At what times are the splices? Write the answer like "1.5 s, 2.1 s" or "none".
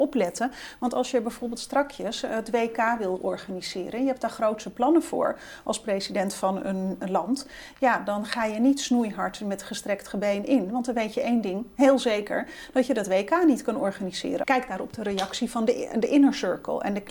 14.4 s